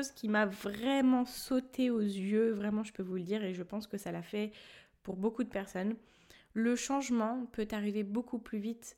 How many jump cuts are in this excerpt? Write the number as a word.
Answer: zero